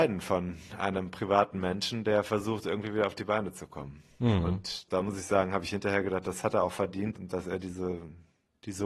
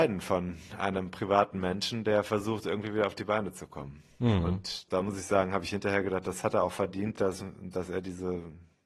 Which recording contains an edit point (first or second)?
first